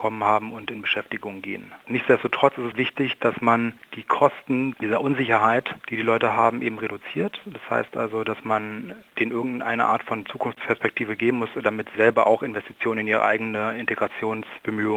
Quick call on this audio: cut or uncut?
cut